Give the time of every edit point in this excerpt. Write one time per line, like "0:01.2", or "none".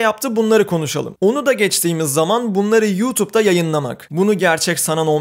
0:01.2
0:04.1